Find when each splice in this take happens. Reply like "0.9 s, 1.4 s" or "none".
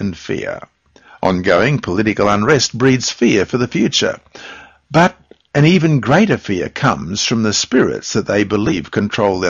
none